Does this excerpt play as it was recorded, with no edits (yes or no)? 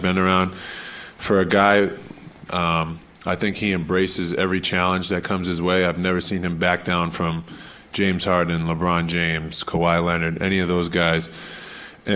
no